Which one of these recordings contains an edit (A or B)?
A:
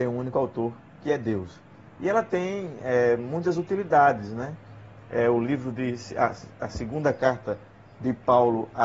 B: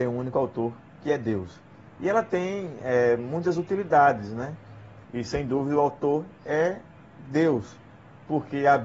B